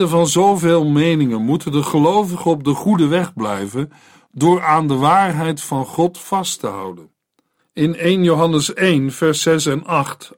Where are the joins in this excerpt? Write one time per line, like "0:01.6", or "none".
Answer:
0:07.6